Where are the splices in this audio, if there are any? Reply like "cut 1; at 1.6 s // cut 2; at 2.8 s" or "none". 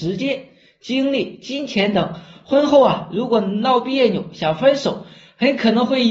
none